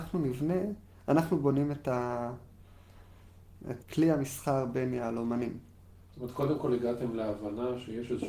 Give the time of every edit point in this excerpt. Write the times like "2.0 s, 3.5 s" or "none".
3.8 s